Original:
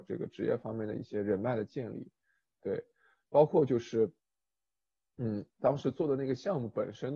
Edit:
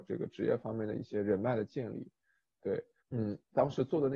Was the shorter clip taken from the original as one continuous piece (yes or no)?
no